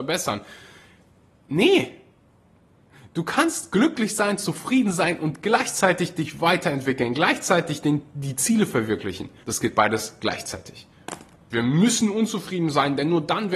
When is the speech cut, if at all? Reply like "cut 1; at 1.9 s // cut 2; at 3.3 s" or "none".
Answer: cut 1; at 9.4 s // cut 2; at 11.5 s